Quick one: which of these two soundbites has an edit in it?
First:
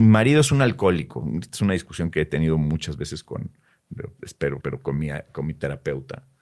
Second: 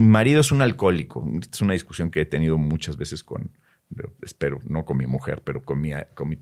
first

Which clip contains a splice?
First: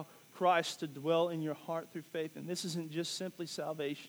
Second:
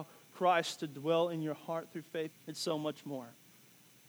second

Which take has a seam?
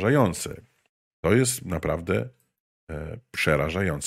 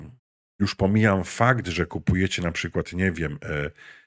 first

